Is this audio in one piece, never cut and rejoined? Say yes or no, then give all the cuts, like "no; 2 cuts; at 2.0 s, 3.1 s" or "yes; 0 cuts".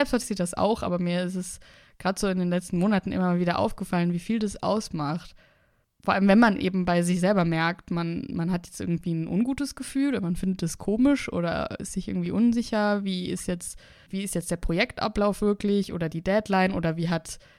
yes; 0 cuts